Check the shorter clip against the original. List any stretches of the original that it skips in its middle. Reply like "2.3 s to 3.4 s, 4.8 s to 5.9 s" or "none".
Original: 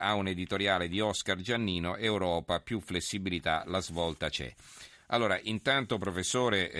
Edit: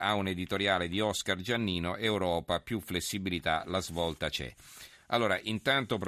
none